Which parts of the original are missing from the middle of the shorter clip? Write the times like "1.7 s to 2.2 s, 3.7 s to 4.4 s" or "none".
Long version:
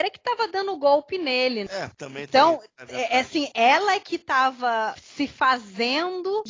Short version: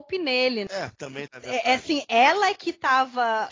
2.2 s to 2.7 s